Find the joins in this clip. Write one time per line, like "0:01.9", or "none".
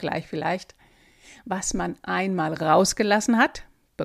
none